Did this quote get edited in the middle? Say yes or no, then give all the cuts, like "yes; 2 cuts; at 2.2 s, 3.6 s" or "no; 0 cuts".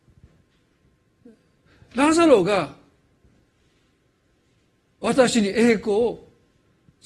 no; 0 cuts